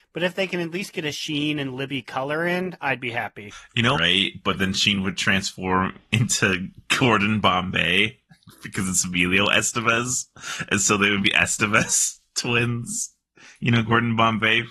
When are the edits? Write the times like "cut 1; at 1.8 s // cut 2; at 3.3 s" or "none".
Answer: cut 1; at 3.9 s // cut 2; at 11.2 s